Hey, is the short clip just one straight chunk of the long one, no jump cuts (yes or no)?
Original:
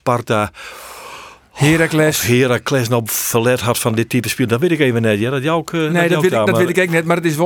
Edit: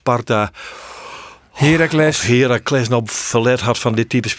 yes